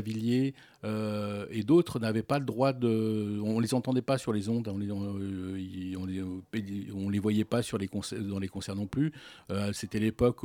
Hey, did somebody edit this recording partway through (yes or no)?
no